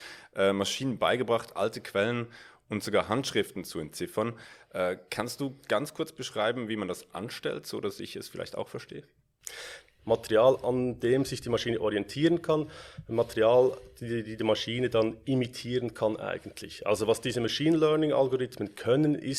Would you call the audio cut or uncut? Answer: cut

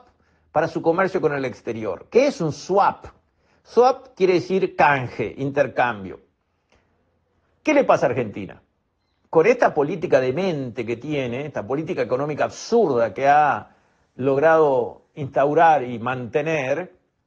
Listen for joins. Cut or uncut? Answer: uncut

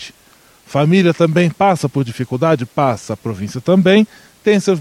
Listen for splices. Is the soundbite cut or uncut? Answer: uncut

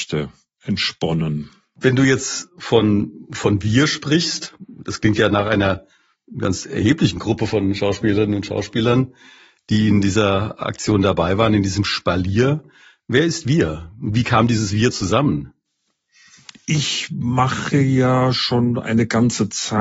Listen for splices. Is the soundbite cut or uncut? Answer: uncut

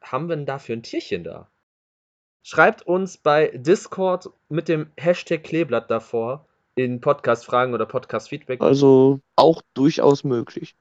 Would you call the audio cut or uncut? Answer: cut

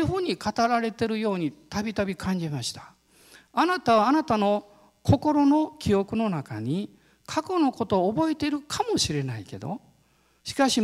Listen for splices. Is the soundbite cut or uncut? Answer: uncut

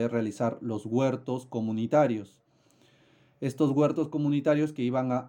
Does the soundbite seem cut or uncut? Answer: uncut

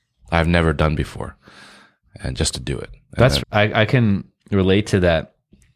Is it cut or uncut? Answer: cut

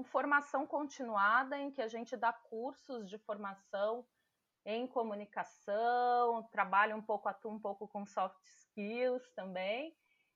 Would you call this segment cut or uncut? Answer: uncut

